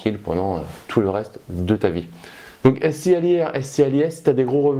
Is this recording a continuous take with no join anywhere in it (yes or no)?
yes